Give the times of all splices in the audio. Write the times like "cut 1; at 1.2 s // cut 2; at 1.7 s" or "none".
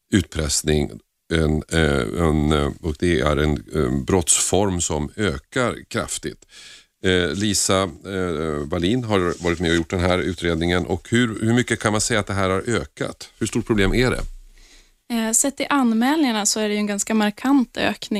none

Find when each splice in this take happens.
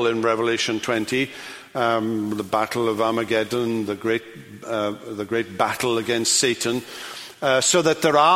none

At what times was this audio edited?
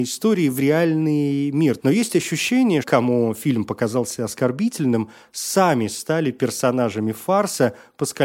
cut 1; at 1.8 s // cut 2; at 2.8 s

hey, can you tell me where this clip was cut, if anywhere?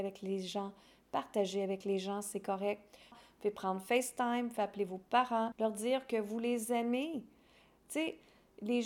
cut 1; at 3.1 s // cut 2; at 5.5 s

